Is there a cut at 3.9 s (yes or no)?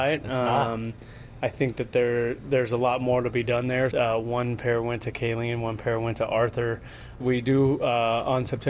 yes